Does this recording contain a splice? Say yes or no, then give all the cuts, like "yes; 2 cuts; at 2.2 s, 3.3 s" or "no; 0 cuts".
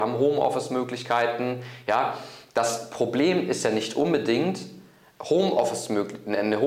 no; 0 cuts